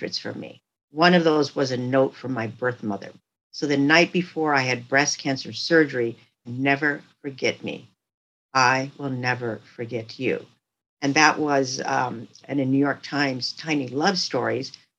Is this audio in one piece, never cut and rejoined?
no; 2 cuts; at 6.4 s, 12.4 s

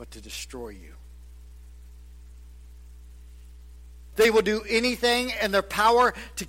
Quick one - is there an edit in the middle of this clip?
yes; 1 cut; at 4.1 s

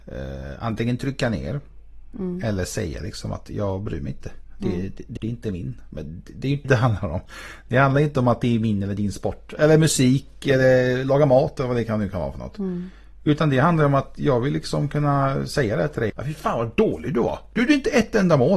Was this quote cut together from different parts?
yes; 3 cuts; at 5.2 s, 6.6 s, 16.1 s

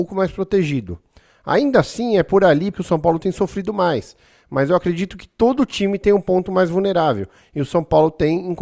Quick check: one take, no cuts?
no; 1 cut; at 2.7 s

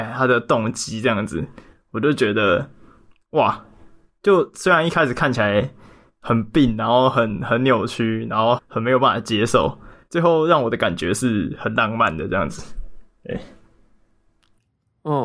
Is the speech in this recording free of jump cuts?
no; 2 cuts; at 8.6 s, 10.1 s

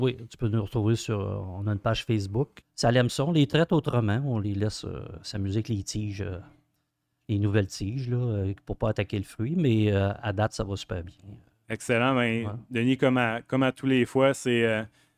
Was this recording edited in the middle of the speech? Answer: yes; 1 cut; at 2.6 s

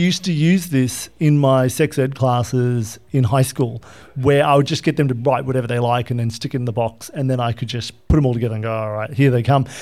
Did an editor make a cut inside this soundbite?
no; 0 cuts

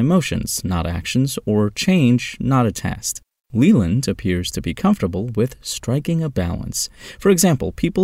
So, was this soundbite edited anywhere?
no; 0 cuts

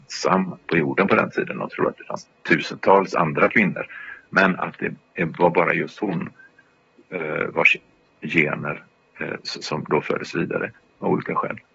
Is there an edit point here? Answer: no; 0 cuts

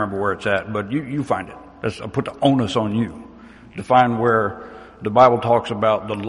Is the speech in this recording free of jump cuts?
yes; 0 cuts

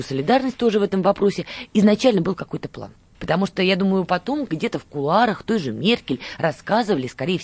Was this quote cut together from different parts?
yes; 1 cut; at 3.1 s

